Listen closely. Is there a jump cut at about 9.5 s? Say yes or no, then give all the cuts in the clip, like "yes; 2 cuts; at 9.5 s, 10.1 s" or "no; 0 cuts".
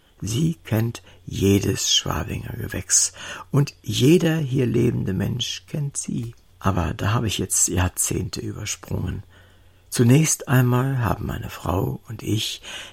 no; 1 cut; at 6.5 s